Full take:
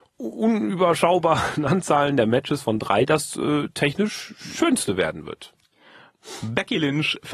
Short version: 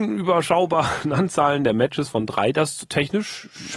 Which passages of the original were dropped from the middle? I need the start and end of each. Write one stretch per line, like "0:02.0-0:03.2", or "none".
0:03.4-0:03.7